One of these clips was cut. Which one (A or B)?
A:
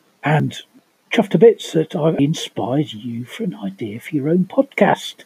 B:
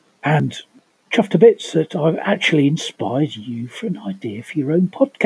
A